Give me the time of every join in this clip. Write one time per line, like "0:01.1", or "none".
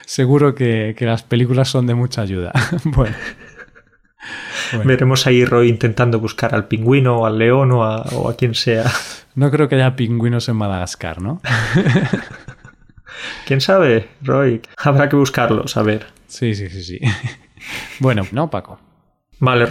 0:14.6
0:18.3